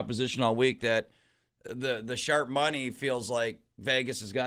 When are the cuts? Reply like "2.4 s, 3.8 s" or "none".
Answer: none

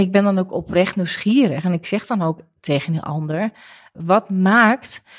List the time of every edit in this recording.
none

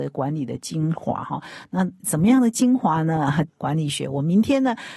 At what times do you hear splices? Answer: 3.5 s

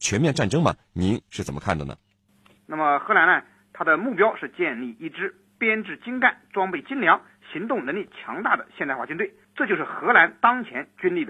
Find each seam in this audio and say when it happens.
2.6 s

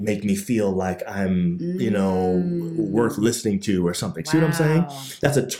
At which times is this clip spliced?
none

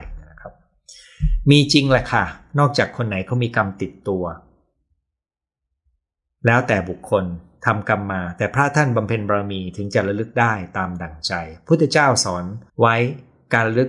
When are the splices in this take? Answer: 12.7 s

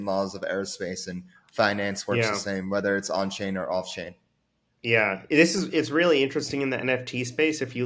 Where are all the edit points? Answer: none

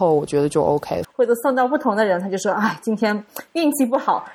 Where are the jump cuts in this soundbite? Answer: 1.0 s

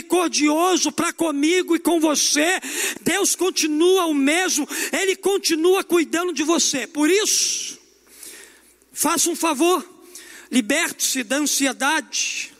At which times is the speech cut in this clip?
3.0 s

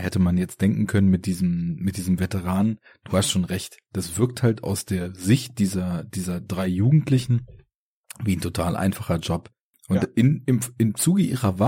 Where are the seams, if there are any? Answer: 9.7 s

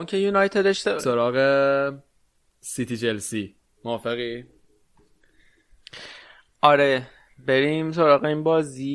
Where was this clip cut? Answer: 1.0 s

